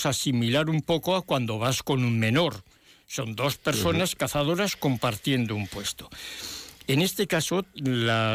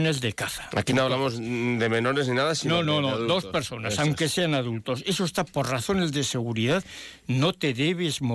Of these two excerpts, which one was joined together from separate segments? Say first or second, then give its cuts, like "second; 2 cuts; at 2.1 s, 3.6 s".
second; 1 cut; at 2.8 s